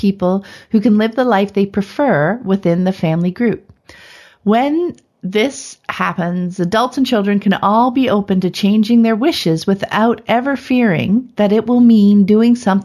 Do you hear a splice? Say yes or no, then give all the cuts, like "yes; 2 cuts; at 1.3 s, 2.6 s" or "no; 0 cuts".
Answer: no; 0 cuts